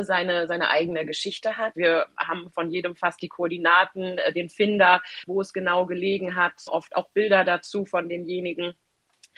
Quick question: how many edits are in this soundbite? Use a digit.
2